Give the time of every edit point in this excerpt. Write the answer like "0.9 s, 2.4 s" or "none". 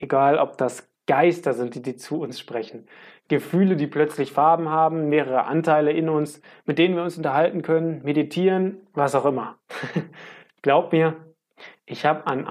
none